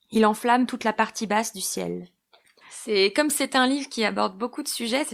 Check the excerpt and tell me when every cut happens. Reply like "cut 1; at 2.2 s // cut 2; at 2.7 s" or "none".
cut 1; at 2.6 s